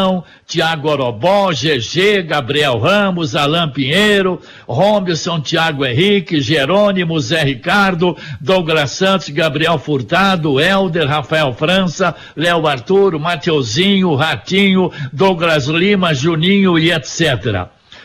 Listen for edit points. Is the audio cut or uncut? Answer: uncut